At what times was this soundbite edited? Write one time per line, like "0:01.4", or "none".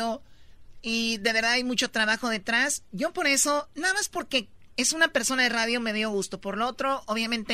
0:03.7